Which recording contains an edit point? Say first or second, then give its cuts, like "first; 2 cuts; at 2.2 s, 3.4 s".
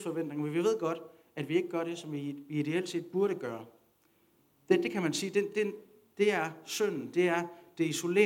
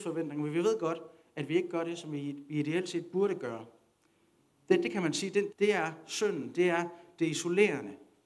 second; 1 cut; at 5.5 s